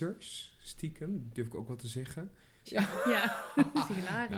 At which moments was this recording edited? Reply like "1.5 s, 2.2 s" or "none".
2.7 s